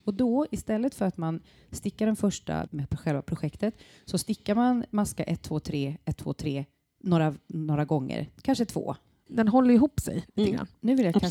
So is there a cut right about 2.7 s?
yes; 2 cuts; at 2.7 s, 9.3 s

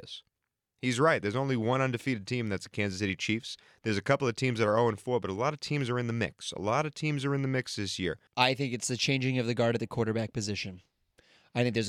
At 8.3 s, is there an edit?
yes; 1 cut; at 8.3 s

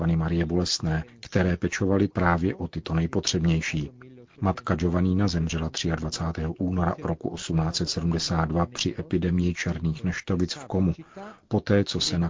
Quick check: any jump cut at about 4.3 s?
no; 0 cuts

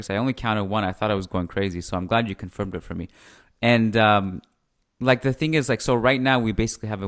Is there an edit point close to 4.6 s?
no; 0 cuts

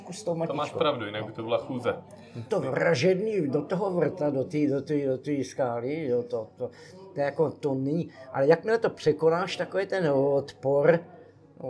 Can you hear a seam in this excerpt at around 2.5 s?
yes; 1 cut; at 2.5 s

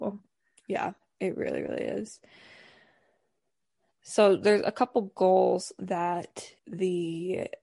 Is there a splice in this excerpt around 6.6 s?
yes; 1 cut; at 6.6 s

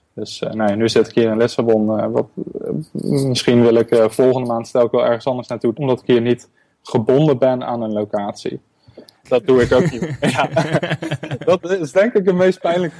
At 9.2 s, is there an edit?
yes; 2 cuts; at 5.7 s, 9.2 s

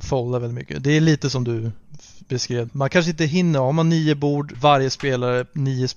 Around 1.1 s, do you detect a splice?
no; 2 cuts; at 2.7 s, 4.5 s

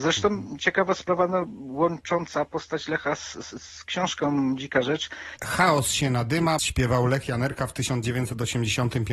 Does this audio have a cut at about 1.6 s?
no; 2 cuts; at 5.4 s, 6.6 s

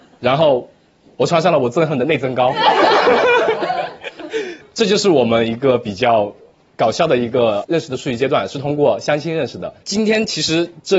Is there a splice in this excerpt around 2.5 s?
no; 1 cut; at 9.8 s

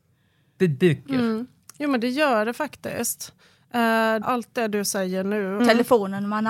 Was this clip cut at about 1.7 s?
no; 2 cuts; at 4.2 s, 5.6 s

